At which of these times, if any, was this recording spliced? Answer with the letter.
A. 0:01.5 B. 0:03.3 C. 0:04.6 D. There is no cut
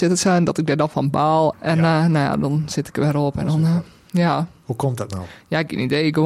A